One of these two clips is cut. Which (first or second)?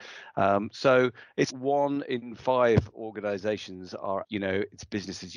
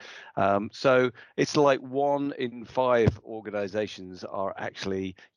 first